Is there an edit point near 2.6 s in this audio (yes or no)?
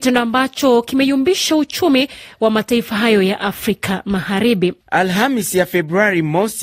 no